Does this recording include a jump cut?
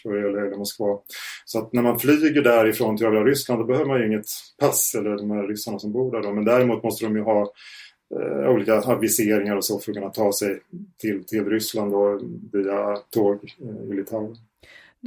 no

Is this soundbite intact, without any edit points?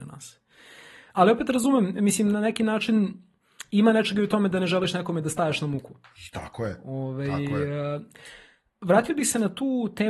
no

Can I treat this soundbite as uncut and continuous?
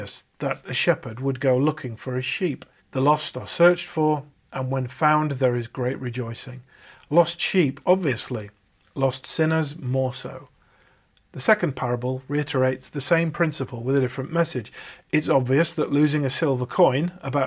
no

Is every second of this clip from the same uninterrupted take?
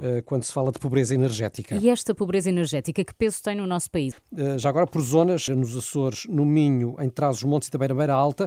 no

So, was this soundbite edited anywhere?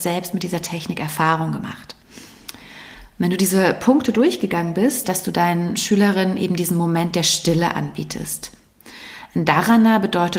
yes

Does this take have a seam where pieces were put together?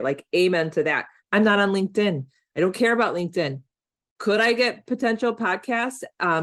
yes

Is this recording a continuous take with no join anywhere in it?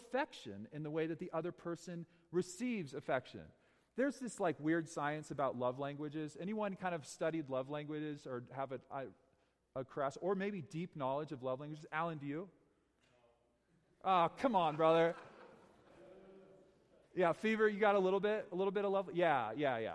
yes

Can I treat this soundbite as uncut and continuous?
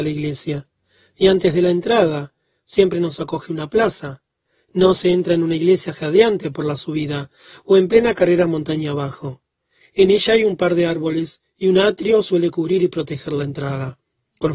no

